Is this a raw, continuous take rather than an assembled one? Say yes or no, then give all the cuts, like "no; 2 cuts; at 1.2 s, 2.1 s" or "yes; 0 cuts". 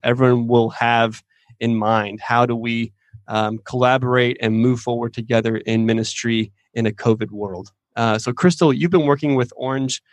yes; 0 cuts